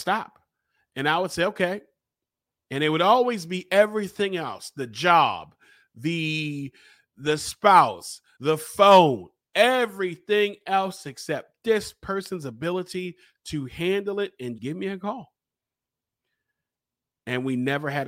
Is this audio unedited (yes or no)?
no